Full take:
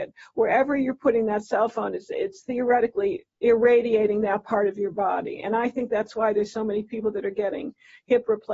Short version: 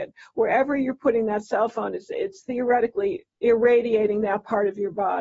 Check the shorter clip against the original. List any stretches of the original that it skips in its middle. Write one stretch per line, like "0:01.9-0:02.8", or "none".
none